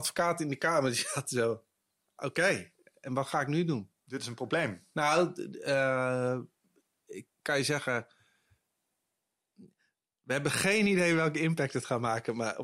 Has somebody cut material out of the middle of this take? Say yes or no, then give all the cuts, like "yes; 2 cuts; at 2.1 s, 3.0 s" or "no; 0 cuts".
no; 0 cuts